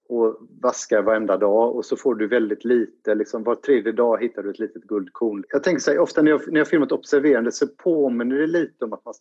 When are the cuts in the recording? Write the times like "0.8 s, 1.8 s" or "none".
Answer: 5.4 s